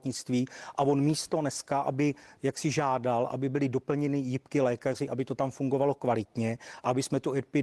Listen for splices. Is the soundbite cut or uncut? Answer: uncut